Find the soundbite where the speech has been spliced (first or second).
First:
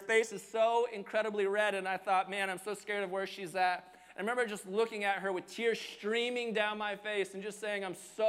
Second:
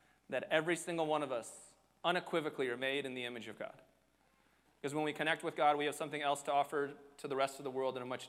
second